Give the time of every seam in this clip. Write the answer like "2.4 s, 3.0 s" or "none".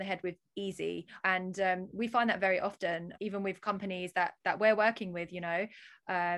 1.2 s, 3.2 s